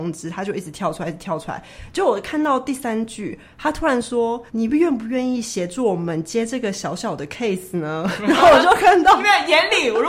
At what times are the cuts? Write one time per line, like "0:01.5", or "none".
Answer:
0:04.5